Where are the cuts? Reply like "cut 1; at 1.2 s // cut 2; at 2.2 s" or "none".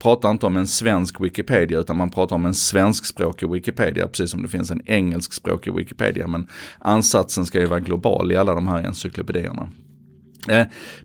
none